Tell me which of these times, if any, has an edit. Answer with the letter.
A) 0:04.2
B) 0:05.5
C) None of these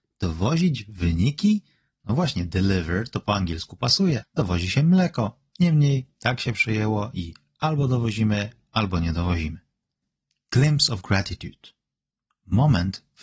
A